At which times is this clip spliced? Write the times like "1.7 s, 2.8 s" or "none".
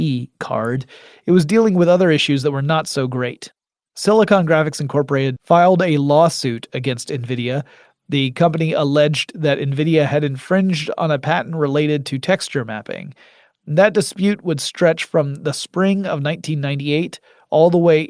5.4 s